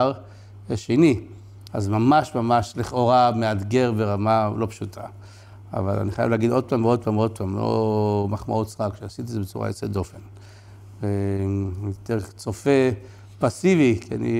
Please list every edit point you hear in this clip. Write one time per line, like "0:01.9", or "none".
0:01.7